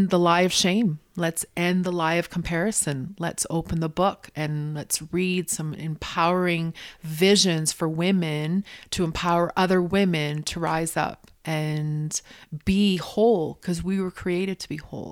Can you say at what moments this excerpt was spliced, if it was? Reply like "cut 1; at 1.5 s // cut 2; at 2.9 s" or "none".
none